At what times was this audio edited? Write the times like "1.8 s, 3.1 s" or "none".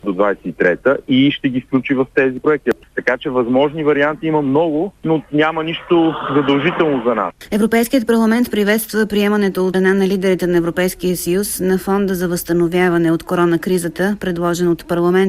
9.7 s